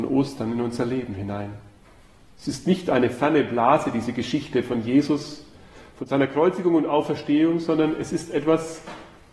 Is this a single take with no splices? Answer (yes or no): yes